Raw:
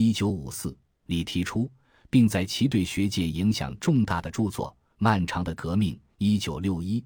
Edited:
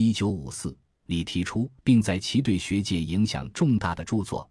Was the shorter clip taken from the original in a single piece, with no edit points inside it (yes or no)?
no